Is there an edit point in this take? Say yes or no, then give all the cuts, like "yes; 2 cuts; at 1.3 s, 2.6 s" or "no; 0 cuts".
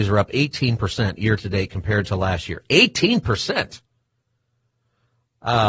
no; 0 cuts